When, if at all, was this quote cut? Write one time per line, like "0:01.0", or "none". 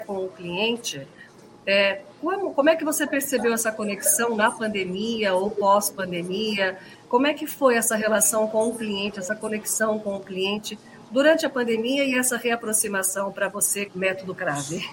0:06.9
0:13.9